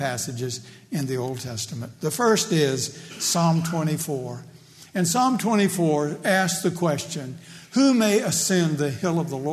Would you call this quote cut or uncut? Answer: uncut